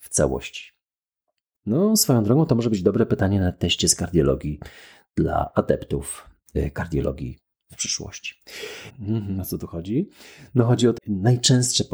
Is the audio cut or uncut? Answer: cut